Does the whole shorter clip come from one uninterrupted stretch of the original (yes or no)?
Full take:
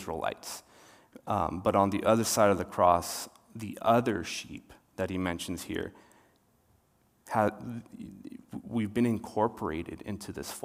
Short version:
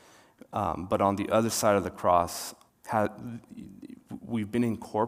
no